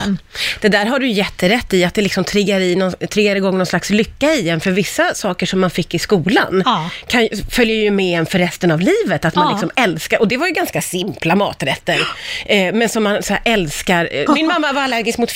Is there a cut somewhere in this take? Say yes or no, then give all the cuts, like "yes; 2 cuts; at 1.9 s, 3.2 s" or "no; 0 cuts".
yes; 1 cut; at 14.3 s